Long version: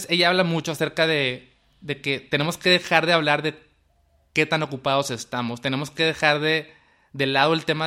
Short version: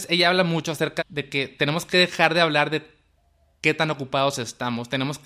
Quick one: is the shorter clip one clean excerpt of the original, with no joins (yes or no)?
no